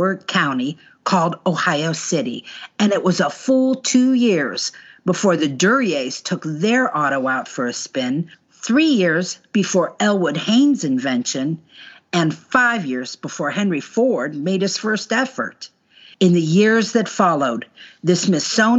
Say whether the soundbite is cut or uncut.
cut